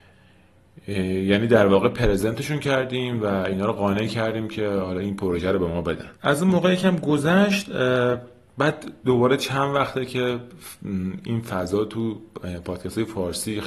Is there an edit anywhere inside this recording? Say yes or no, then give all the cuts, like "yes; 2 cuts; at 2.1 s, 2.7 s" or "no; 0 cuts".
yes; 1 cut; at 6.2 s